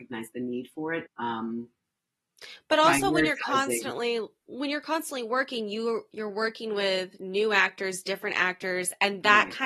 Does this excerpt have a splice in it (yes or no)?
yes